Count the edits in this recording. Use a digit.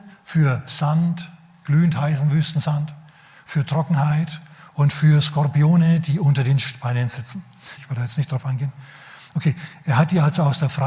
1